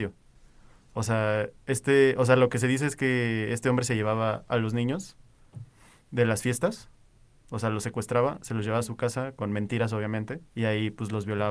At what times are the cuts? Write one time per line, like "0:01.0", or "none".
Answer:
0:10.5